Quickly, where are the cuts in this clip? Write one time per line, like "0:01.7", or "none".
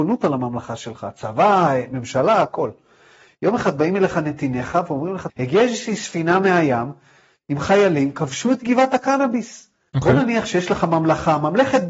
0:05.3
0:09.9